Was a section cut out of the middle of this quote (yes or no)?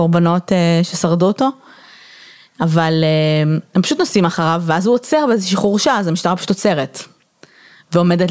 no